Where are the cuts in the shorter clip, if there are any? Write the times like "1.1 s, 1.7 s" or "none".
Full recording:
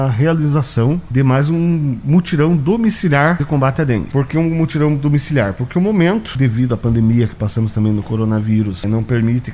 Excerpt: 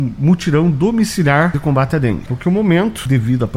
2.3 s